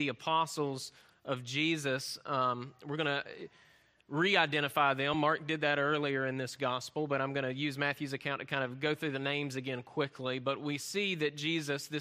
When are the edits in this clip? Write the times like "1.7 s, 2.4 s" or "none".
none